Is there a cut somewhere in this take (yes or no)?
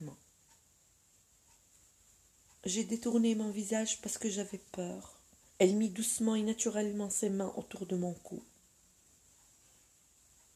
yes